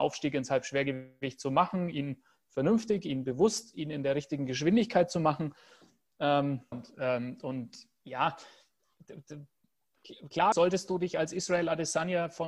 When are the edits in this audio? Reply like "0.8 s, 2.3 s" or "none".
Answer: 6.7 s, 10.5 s